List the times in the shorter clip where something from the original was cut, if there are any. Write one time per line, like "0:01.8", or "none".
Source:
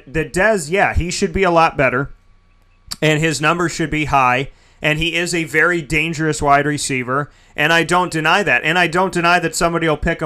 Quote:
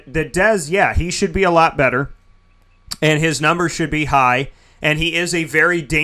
none